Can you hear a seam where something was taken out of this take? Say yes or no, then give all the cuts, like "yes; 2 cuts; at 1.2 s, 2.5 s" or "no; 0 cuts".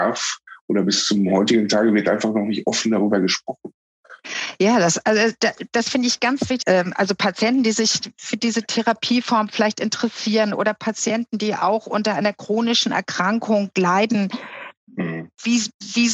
yes; 1 cut; at 6.6 s